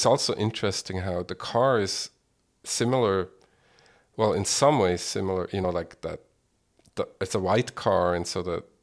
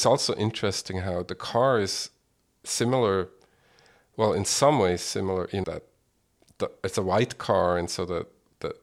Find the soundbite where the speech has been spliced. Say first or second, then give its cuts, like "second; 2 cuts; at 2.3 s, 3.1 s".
second; 1 cut; at 5.6 s